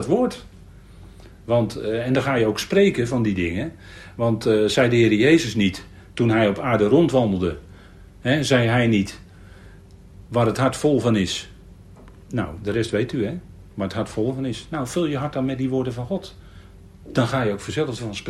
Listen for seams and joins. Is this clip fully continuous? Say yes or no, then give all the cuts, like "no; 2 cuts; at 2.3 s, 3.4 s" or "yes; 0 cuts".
yes; 0 cuts